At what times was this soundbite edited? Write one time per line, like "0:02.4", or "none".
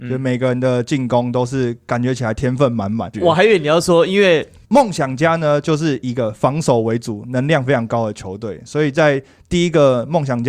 0:03.1
0:04.6